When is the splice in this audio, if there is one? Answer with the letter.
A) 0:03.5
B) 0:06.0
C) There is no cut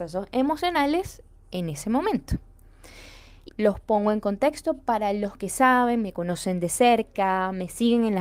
A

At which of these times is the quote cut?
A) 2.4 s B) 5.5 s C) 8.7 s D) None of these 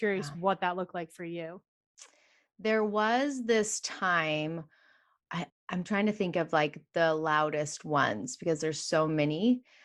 B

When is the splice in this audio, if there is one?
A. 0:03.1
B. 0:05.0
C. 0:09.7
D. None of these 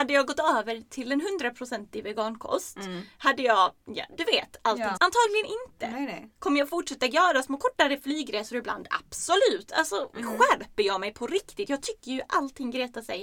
B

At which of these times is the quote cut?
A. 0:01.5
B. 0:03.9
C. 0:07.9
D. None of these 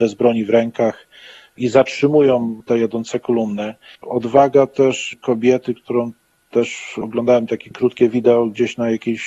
B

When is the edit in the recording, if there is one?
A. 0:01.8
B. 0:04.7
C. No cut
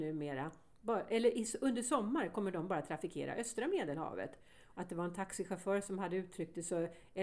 B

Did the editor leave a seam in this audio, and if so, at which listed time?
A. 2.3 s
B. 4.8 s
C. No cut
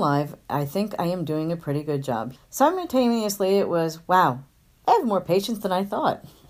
A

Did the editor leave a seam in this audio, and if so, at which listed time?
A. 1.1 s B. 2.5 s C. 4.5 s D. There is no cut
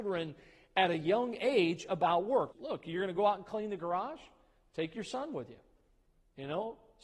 B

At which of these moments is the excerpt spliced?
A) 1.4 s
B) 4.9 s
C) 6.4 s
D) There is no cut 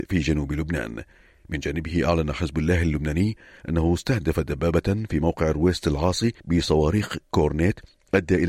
C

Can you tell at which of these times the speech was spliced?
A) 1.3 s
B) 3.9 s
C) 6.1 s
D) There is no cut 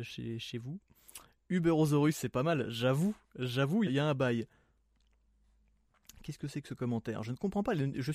B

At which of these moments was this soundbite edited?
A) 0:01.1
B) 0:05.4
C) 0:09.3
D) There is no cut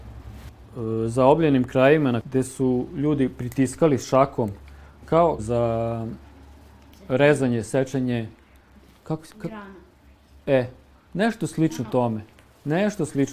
B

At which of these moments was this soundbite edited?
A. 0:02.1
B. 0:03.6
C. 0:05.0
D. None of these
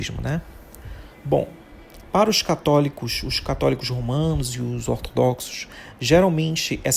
D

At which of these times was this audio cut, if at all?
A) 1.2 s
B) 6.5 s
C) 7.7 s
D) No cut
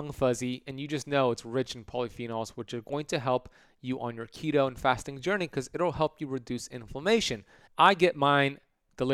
C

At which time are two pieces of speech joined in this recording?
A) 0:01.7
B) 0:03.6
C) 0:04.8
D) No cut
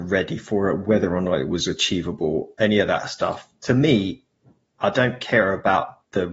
D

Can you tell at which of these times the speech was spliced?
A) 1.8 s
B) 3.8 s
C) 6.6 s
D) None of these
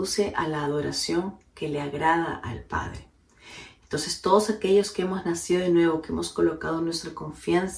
D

